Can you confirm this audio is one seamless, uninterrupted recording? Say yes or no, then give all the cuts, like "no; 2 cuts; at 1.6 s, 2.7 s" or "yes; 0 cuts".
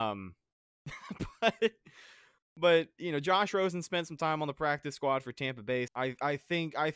no; 1 cut; at 5.9 s